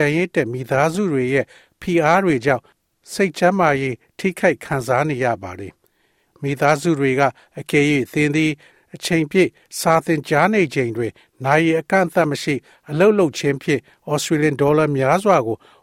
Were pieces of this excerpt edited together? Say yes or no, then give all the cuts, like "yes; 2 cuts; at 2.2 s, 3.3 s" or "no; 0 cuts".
no; 0 cuts